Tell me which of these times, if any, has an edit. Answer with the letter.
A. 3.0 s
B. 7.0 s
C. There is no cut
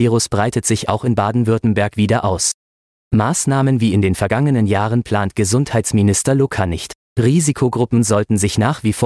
B